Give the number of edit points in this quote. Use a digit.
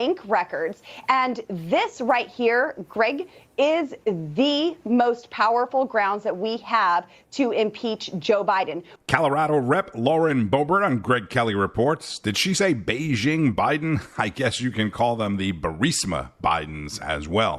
1